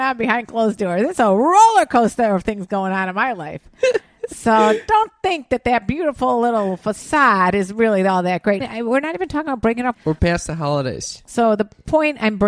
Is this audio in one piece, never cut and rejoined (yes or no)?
no